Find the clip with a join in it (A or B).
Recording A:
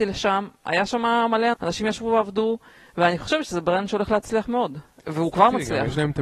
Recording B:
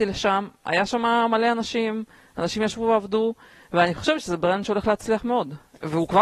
A